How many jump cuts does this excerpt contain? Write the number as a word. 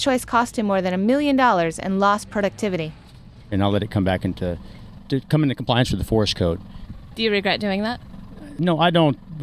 zero